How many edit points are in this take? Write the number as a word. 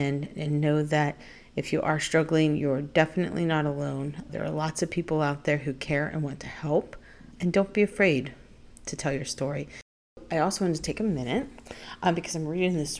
two